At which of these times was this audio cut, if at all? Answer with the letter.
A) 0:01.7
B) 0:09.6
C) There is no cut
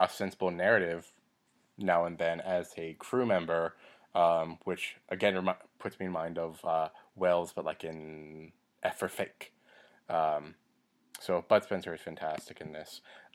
C